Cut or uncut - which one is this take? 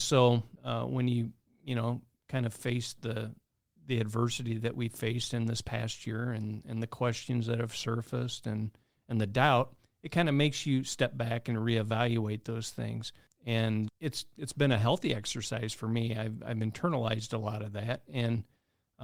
cut